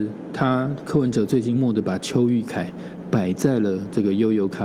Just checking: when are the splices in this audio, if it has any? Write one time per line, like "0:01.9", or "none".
0:01.5